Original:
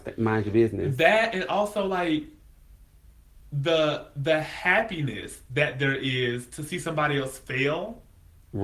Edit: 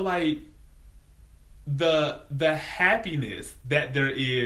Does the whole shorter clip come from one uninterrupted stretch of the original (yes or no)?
yes